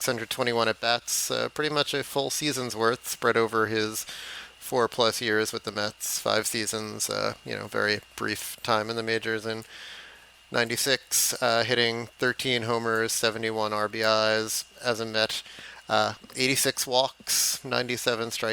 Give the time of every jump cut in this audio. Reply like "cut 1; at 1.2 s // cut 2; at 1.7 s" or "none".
none